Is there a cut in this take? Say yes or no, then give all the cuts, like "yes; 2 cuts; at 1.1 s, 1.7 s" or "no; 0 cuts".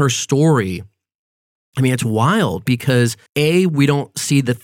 yes; 1 cut; at 3.3 s